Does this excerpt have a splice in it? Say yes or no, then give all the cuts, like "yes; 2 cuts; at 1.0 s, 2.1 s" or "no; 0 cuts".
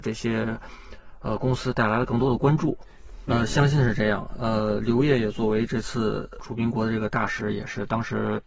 yes; 1 cut; at 3.3 s